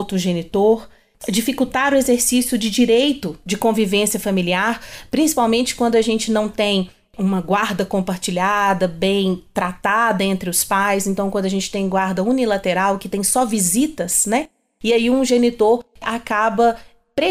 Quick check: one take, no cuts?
yes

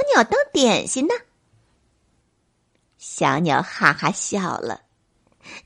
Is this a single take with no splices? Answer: yes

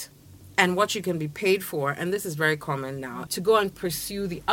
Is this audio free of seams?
no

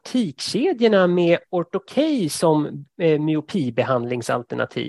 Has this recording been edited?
no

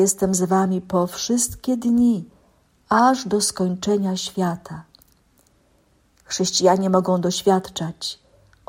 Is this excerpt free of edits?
yes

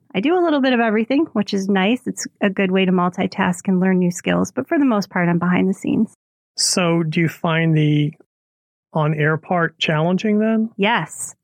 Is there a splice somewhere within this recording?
no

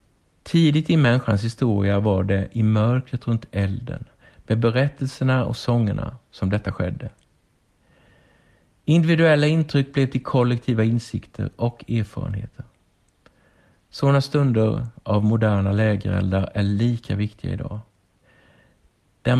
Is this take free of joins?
yes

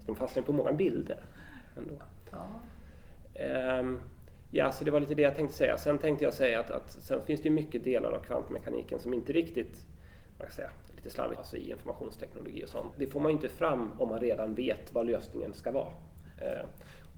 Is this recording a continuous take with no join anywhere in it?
no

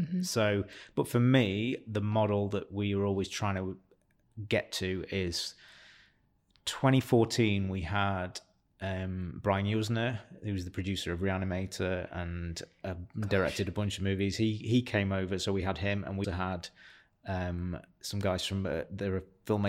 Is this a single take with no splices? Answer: no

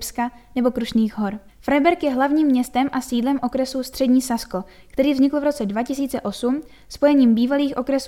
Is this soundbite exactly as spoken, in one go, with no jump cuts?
no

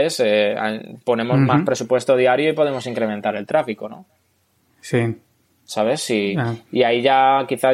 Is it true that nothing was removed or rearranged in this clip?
yes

